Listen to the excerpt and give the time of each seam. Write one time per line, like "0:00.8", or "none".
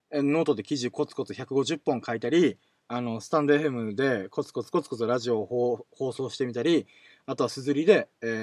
none